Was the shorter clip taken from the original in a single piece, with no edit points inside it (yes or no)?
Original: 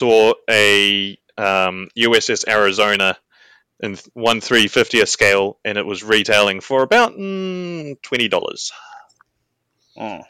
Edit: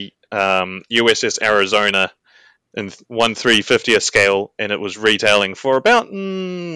yes